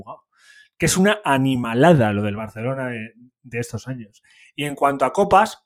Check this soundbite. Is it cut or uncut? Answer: uncut